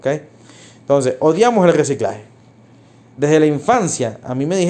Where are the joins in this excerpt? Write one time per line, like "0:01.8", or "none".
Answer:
none

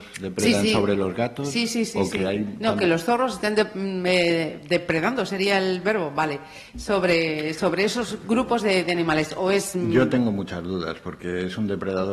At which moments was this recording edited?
none

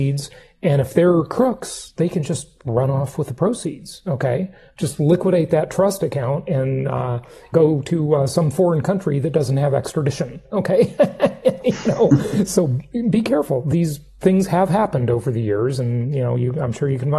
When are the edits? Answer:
none

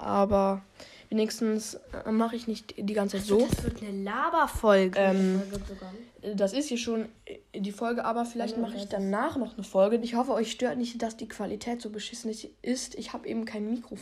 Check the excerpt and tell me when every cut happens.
0:04.9
0:10.0

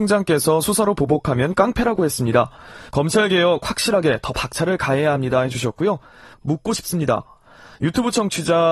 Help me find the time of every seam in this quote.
0:02.9
0:06.3

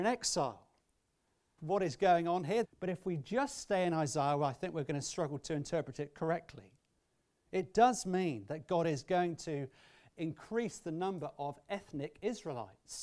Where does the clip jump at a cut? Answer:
0:01.6
0:02.6

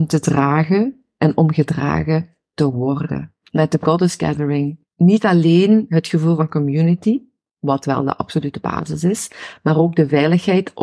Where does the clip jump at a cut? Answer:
0:03.4

